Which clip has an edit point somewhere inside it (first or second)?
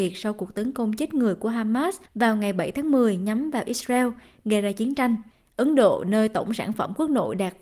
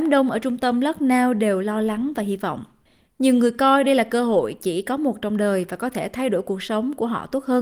first